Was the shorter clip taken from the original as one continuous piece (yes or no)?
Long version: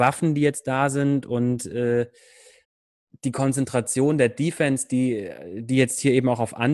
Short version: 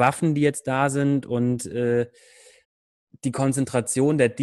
yes